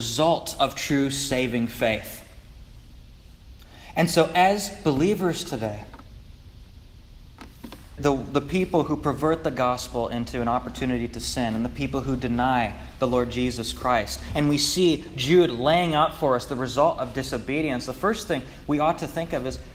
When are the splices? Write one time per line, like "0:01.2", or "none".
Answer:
0:08.0